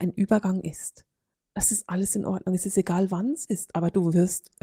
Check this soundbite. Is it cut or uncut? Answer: cut